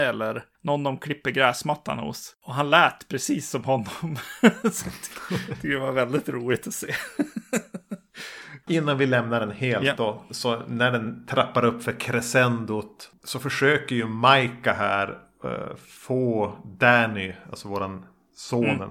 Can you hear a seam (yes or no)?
yes